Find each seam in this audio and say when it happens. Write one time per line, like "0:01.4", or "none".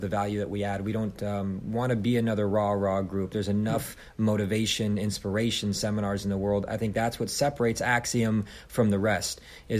none